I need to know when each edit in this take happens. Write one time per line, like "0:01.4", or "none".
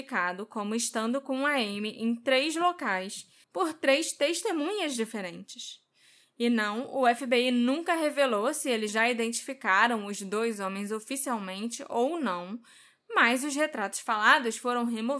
0:03.4
0:08.9